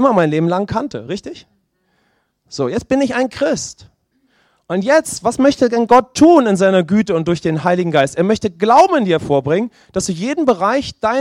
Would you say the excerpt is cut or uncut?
uncut